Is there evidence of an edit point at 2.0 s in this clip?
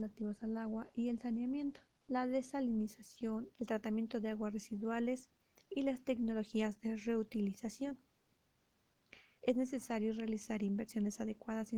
yes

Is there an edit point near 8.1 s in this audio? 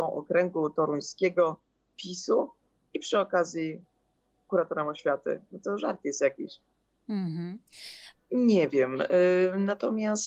yes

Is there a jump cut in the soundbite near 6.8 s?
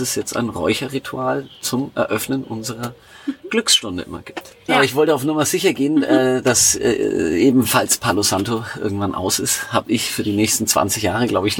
no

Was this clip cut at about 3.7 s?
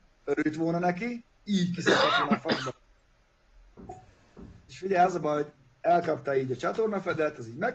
yes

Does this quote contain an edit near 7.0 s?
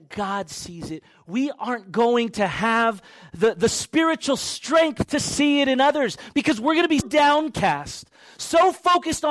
yes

